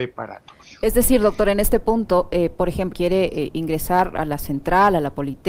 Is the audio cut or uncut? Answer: cut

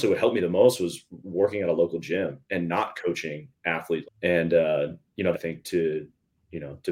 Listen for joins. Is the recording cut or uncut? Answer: cut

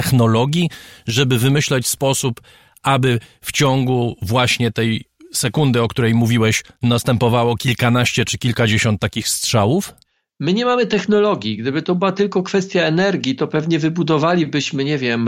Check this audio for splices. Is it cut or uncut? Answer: uncut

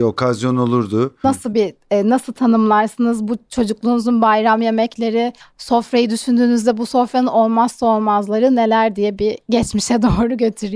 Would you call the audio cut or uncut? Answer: cut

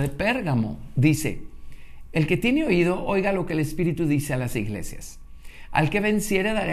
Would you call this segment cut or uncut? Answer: uncut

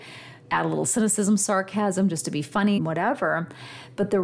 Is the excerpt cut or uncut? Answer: cut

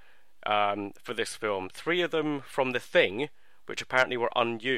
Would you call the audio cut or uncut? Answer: uncut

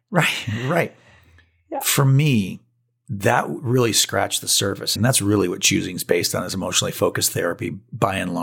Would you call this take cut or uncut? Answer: cut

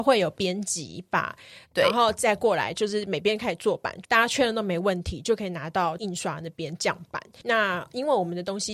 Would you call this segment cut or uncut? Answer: cut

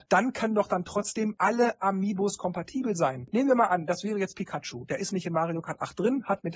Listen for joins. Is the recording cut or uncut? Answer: uncut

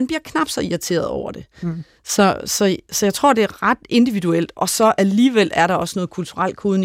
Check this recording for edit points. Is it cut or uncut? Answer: uncut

